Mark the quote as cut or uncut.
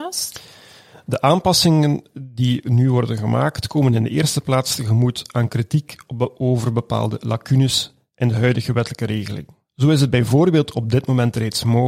cut